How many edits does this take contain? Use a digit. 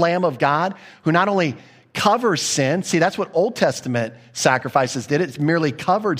0